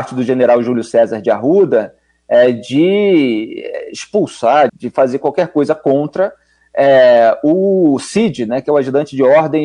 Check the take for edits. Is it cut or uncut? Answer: cut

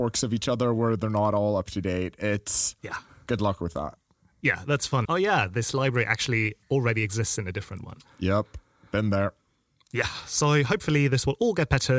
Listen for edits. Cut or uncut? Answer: cut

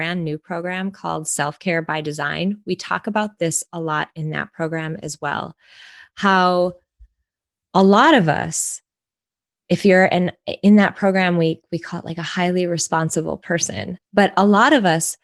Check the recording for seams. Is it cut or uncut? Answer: uncut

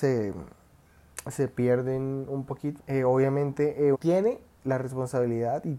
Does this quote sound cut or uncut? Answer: cut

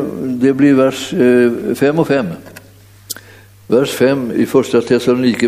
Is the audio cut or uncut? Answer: cut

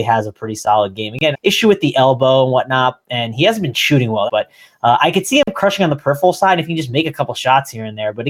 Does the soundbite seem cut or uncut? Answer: cut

